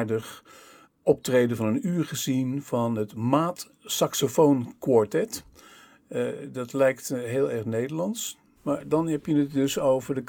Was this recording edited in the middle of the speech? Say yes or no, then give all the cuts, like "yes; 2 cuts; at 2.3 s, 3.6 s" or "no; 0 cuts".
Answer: yes; 1 cut; at 8.6 s